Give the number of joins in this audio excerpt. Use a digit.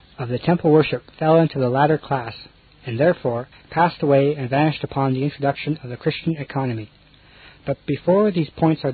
1